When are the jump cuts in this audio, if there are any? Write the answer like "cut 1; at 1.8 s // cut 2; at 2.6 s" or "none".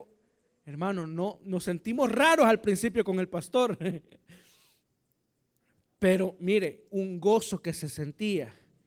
none

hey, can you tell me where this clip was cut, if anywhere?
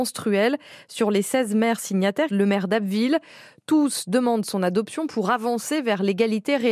cut 1; at 2.3 s

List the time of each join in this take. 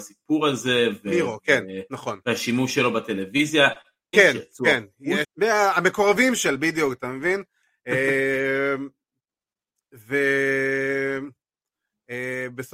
cut 1; at 4.1 s // cut 2; at 5.2 s

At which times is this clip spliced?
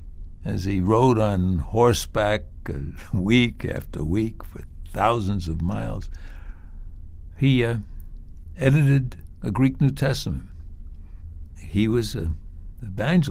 none

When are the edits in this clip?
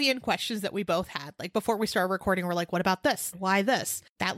cut 1; at 3.3 s

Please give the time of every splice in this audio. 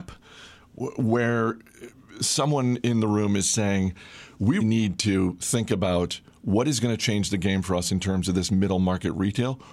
cut 1; at 4.6 s

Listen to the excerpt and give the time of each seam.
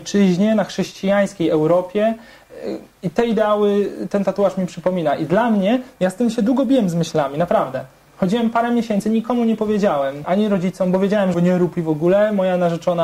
cut 1; at 10.2 s // cut 2; at 11.3 s

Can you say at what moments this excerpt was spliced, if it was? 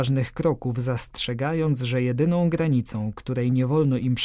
none

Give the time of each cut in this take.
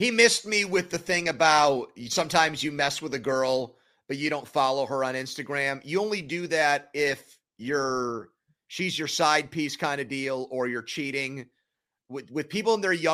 none

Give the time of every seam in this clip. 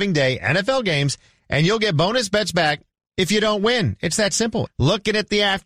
cut 1; at 4.7 s

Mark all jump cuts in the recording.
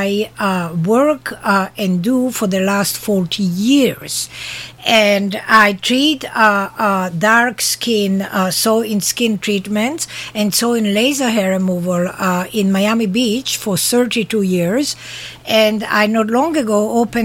none

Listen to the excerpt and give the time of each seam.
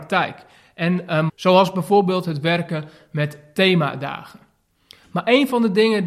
cut 1; at 1.3 s

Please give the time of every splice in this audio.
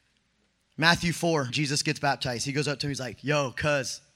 cut 1; at 1.5 s

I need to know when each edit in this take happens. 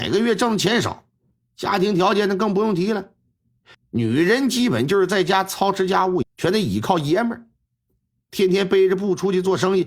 cut 1; at 3.7 s // cut 2; at 6.2 s // cut 3; at 8.3 s

